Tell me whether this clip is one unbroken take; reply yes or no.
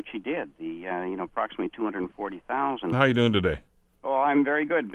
no